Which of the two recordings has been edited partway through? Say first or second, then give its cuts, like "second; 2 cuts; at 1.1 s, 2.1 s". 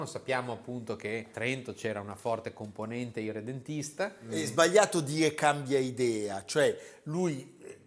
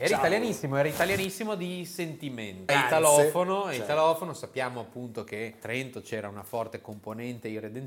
second; 1 cut; at 2.7 s